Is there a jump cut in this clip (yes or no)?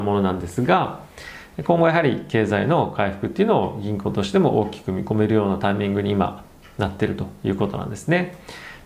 no